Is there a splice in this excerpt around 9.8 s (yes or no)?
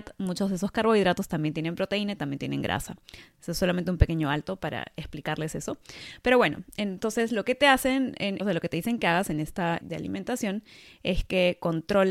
yes